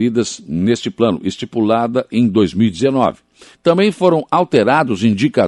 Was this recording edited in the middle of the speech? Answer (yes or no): yes